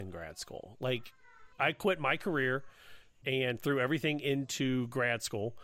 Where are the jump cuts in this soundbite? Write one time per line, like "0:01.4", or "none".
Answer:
0:01.5